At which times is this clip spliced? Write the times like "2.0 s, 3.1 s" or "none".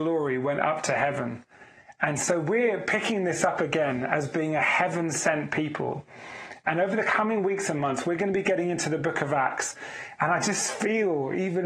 none